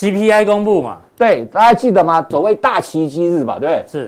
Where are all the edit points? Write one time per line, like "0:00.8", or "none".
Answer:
0:02.3